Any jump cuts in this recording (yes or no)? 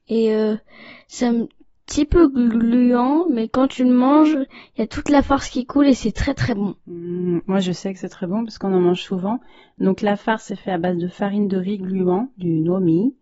no